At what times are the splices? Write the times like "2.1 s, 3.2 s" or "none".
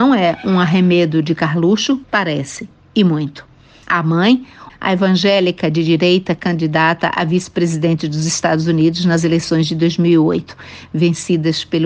2.0 s, 4.7 s